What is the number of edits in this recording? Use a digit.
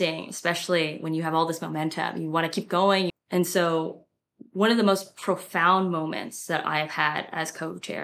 1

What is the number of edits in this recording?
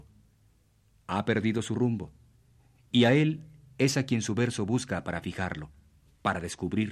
0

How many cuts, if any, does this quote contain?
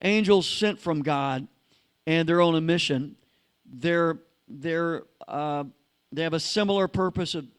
0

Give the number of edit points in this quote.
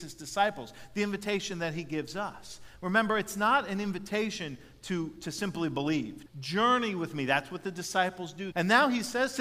2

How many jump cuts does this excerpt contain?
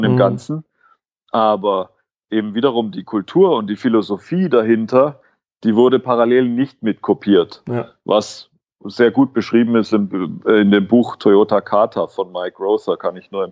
0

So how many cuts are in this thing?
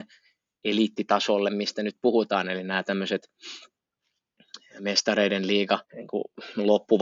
1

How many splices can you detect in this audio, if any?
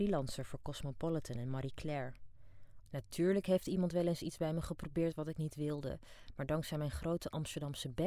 1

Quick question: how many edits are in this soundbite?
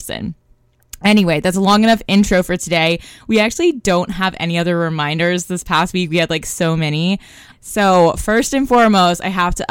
1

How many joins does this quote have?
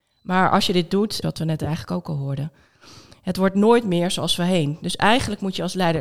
1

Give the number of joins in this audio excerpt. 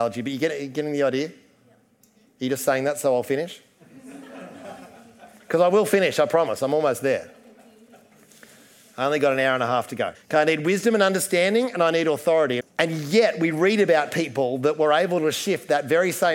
2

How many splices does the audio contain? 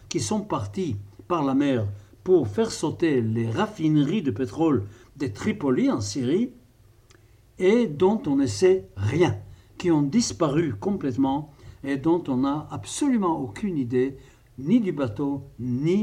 0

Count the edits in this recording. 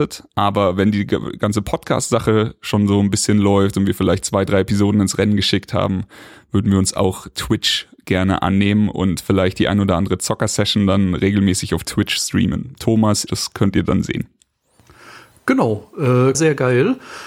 2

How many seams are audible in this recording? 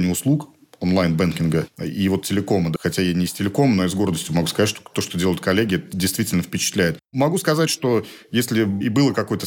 2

